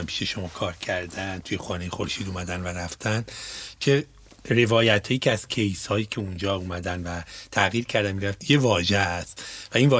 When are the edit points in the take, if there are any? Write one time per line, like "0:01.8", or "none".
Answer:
0:08.4